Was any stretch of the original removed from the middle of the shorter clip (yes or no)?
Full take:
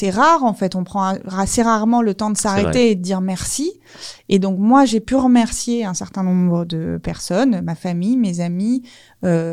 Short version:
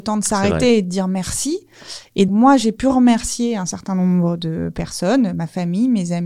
yes